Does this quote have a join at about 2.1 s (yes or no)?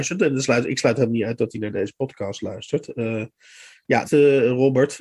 no